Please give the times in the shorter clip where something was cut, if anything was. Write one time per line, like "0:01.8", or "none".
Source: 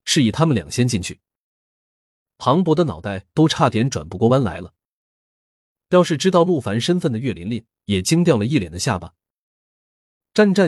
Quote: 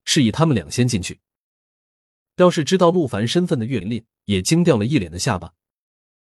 0:02.3
0:03.8